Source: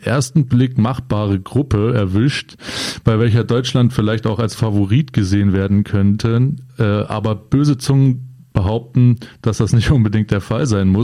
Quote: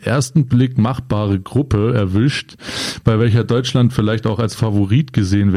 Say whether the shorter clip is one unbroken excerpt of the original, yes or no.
yes